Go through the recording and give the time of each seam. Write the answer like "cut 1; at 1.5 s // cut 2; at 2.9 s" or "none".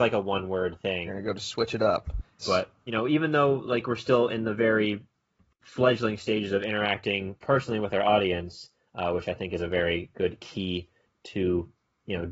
cut 1; at 1.1 s // cut 2; at 2.4 s